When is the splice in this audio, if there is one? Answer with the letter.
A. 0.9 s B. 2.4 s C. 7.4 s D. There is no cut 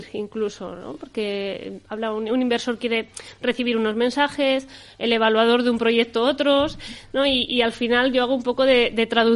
D